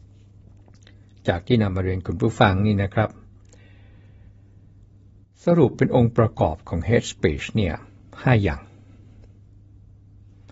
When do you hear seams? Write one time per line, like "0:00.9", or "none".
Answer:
none